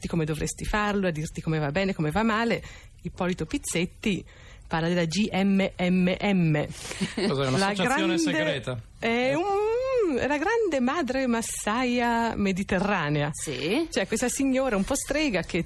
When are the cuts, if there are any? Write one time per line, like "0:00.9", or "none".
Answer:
none